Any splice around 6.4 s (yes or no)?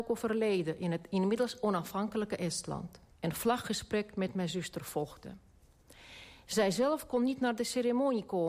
no